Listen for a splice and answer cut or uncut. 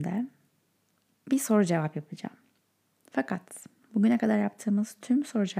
uncut